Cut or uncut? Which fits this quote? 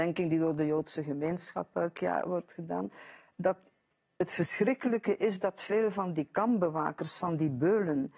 uncut